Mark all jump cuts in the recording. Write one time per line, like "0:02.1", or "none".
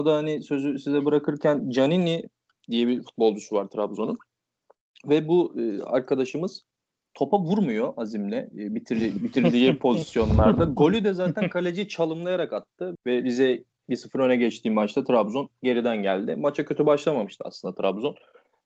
0:13.0